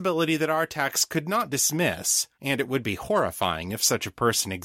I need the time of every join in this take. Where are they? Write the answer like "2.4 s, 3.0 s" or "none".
2.4 s